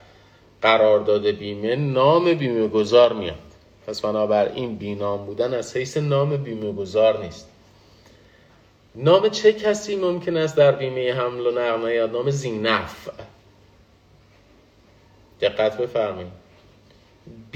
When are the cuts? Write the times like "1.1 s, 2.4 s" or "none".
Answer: none